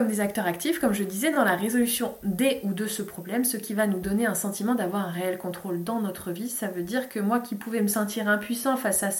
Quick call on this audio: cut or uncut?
uncut